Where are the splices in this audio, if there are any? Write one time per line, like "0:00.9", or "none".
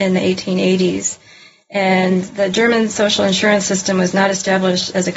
none